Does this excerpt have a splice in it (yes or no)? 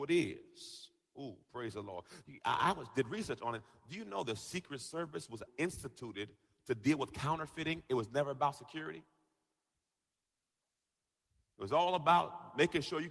yes